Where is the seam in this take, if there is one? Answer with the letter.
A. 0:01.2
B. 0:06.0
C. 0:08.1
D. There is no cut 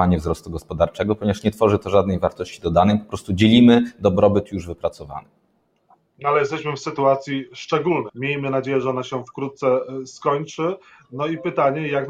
C